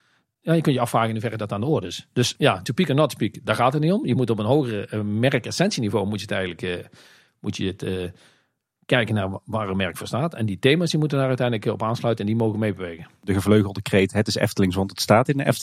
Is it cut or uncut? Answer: cut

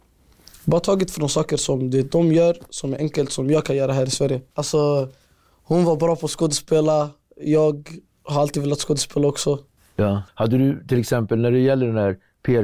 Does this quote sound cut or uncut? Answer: cut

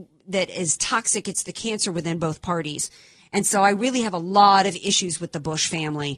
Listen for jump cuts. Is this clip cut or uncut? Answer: uncut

